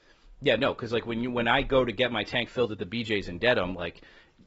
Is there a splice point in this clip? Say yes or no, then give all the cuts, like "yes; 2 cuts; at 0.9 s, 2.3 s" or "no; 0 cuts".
no; 0 cuts